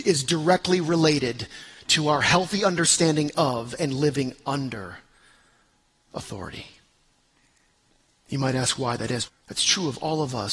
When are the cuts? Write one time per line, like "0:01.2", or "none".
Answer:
0:09.3